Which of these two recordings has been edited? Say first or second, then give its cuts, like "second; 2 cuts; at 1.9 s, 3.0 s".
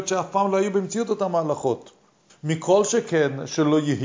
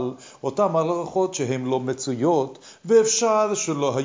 first; 1 cut; at 2.3 s